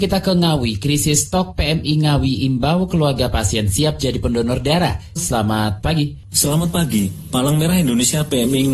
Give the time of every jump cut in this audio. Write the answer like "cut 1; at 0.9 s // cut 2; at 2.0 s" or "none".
cut 1; at 5.2 s

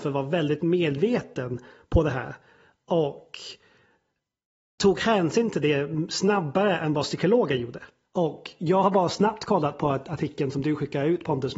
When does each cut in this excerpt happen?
cut 1; at 8.0 s

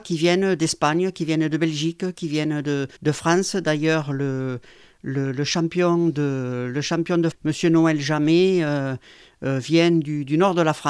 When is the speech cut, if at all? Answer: cut 1; at 3.0 s // cut 2; at 7.3 s

